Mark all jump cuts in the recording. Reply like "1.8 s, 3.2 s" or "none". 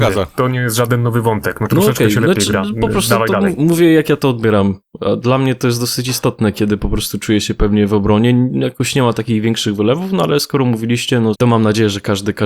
11.4 s